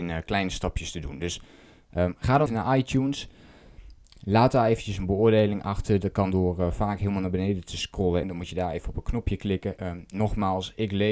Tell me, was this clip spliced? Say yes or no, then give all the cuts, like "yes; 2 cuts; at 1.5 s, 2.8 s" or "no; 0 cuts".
yes; 3 cuts; at 2.5 s, 8.2 s, 9.8 s